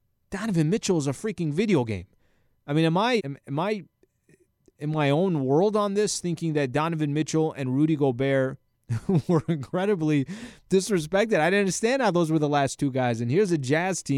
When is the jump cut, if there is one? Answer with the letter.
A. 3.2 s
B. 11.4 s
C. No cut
A